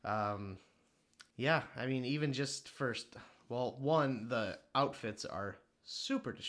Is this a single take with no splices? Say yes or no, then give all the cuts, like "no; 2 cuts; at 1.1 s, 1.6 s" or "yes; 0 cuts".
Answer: no; 1 cut; at 1.3 s